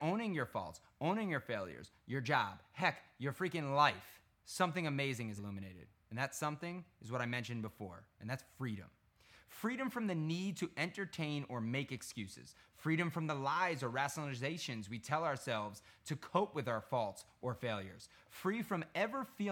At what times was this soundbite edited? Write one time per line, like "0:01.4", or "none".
0:04.3
0:05.4